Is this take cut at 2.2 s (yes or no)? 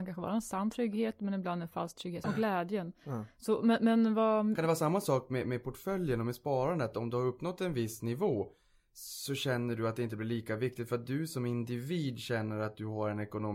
yes